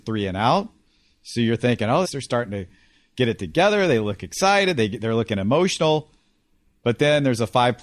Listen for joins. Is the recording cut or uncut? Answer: cut